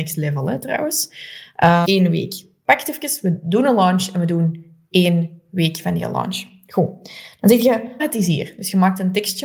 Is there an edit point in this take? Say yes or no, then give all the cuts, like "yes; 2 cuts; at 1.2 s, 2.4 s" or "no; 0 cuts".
yes; 2 cuts; at 1.8 s, 8.0 s